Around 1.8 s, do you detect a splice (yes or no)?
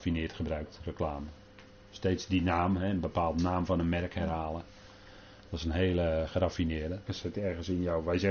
no